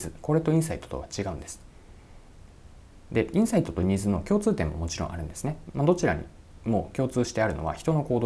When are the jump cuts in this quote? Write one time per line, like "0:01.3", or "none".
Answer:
0:05.7

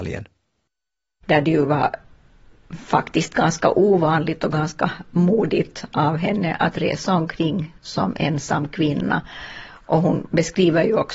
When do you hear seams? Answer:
none

